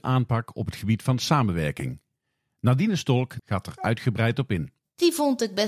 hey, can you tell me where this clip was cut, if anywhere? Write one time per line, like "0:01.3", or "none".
0:03.4